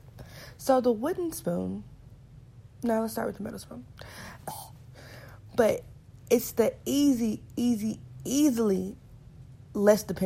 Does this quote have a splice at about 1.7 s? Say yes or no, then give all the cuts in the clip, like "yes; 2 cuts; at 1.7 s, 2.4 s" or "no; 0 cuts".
no; 2 cuts; at 4.4 s, 6.8 s